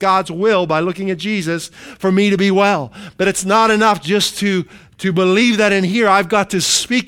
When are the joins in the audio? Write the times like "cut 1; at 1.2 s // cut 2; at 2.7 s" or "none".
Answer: none